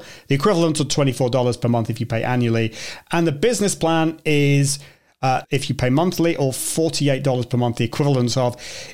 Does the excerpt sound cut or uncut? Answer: cut